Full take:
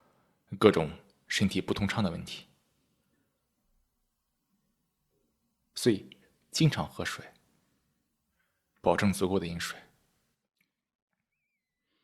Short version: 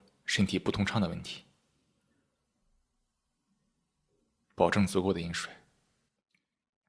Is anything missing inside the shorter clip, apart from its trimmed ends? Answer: yes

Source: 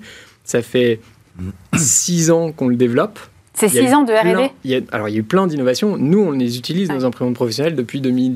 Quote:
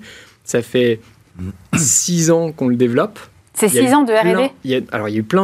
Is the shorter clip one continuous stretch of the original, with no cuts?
yes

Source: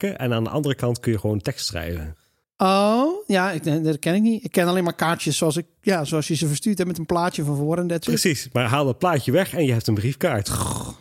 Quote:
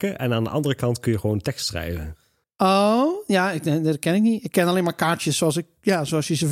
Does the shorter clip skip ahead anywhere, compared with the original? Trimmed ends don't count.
no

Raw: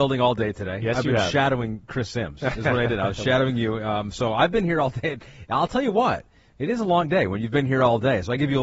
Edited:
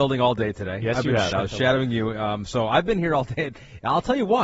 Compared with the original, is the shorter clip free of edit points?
no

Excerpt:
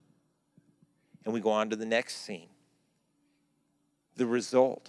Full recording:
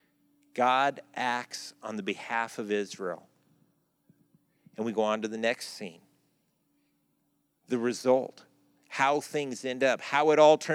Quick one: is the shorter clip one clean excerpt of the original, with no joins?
yes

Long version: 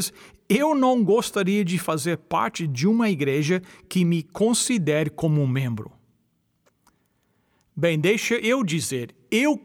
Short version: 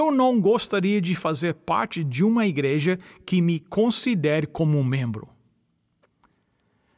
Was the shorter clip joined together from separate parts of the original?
no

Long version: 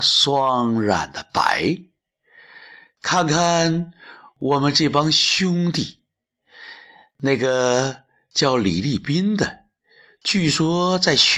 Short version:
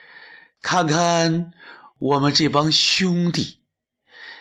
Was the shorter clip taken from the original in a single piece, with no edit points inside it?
yes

